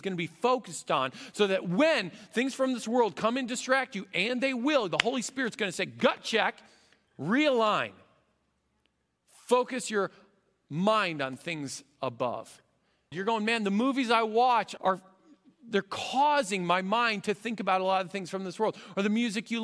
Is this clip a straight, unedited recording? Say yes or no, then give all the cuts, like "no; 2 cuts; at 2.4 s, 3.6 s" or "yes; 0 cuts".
no; 2 cuts; at 13.1 s, 14.8 s